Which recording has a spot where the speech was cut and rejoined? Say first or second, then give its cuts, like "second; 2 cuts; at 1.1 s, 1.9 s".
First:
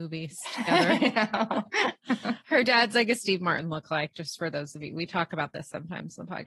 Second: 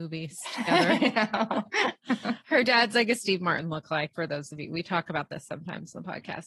second; 1 cut; at 4.1 s